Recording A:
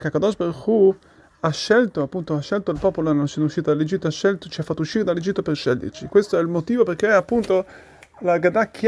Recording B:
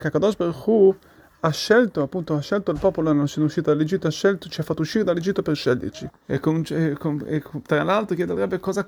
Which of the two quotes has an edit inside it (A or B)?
B